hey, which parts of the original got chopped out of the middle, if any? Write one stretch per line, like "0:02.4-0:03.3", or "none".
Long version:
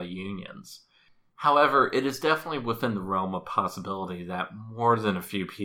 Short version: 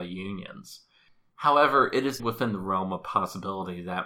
0:02.2-0:02.6